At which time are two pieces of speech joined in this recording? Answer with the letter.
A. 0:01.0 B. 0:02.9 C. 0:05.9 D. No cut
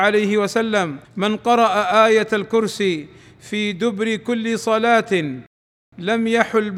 A